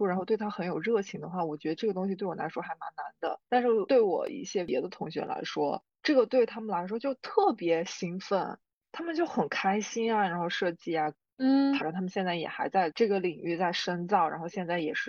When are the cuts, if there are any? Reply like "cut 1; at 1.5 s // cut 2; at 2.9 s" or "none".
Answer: cut 1; at 11.8 s